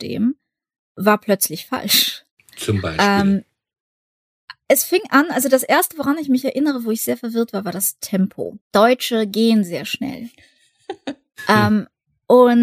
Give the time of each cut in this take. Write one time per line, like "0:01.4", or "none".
0:08.6